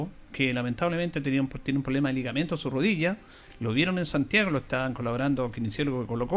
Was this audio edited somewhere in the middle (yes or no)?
no